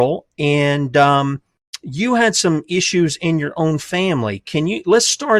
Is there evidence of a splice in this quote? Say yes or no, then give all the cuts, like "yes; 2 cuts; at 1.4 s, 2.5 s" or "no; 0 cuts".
no; 0 cuts